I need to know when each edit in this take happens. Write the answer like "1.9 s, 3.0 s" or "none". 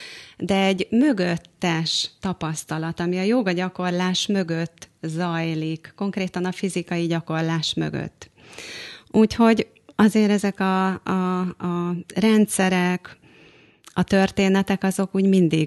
none